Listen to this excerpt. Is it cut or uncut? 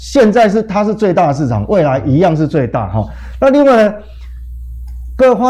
uncut